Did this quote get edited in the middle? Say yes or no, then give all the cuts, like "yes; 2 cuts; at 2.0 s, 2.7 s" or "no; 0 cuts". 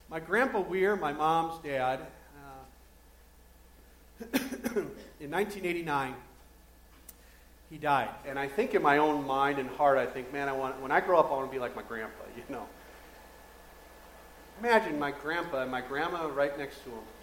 yes; 2 cuts; at 8.2 s, 14.6 s